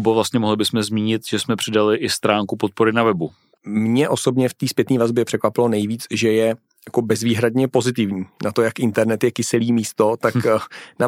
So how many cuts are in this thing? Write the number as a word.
one